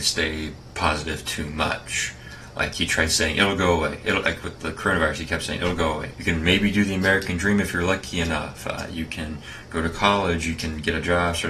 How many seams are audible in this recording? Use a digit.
1